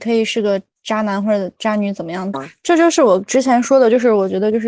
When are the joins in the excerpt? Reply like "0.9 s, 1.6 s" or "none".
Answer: 2.3 s

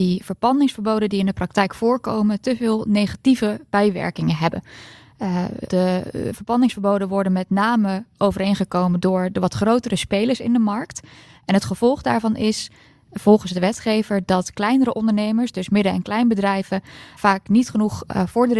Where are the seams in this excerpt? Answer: 5.7 s, 17.2 s

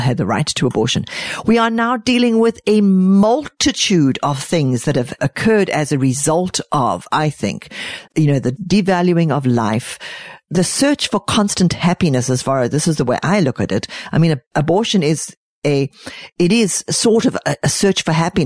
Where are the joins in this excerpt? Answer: 8.1 s

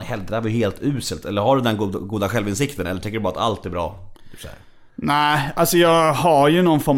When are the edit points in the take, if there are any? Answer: none

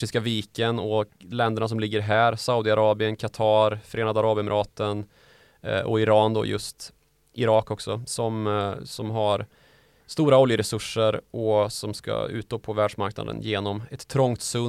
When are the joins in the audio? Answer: none

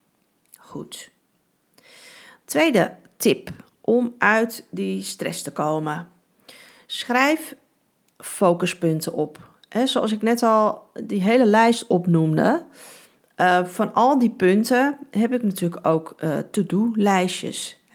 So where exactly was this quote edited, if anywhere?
none

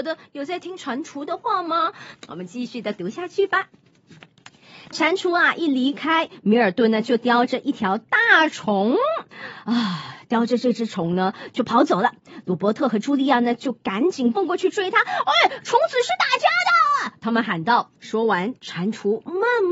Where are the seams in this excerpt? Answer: 2.1 s, 18.0 s

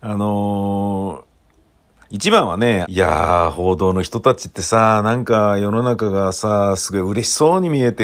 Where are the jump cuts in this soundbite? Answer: 2.8 s, 6.8 s

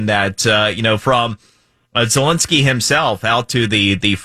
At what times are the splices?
none

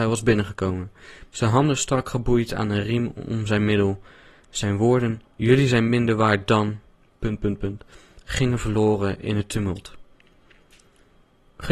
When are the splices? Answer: 1.3 s

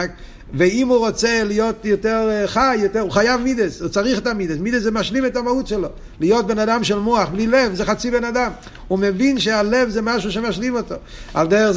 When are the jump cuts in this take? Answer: none

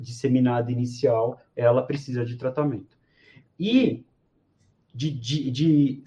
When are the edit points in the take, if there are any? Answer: none

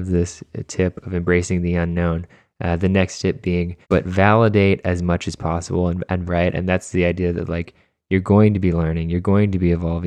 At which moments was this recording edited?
3.8 s, 6.3 s

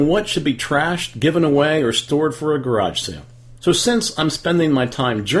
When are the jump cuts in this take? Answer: 3.6 s

